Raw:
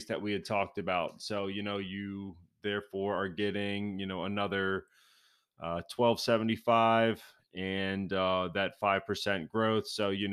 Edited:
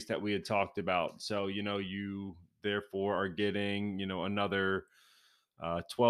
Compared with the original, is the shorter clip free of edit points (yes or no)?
yes